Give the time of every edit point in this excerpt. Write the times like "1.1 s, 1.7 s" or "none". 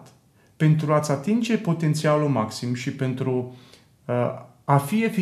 none

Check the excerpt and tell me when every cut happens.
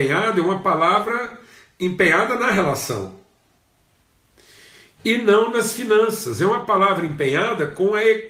none

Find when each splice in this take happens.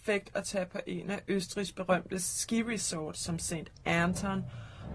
none

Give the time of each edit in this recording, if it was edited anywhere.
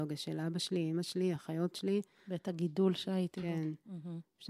1.4 s

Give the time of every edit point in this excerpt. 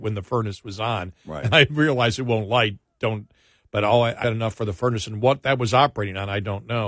1.5 s, 4.2 s

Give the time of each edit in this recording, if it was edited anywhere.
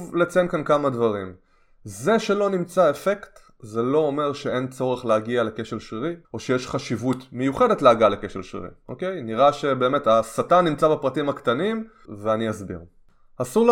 6.2 s, 12.1 s

